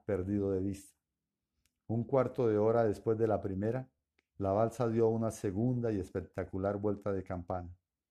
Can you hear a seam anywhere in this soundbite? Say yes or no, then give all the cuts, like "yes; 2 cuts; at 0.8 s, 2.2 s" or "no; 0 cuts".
no; 0 cuts